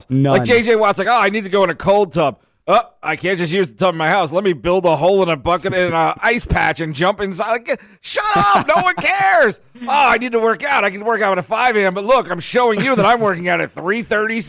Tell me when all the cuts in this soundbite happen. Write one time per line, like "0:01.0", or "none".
none

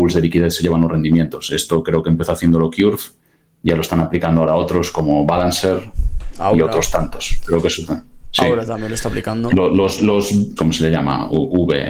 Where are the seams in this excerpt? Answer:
0:10.6

